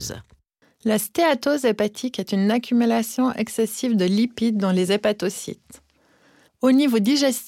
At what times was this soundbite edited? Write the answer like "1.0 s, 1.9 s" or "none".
6.5 s